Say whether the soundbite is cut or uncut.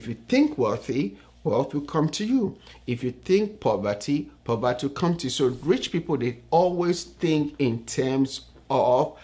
uncut